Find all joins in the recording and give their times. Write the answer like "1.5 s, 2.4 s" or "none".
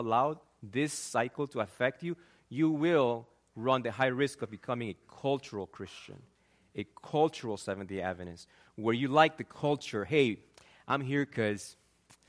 none